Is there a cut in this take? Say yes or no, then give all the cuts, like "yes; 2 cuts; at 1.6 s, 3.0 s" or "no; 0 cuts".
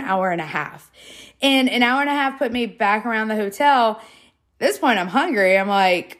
no; 0 cuts